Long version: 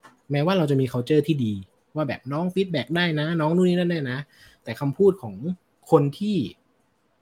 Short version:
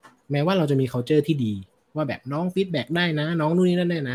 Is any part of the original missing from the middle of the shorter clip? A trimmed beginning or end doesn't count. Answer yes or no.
no